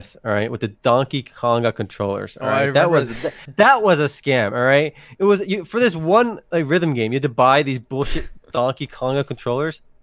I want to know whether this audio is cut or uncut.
uncut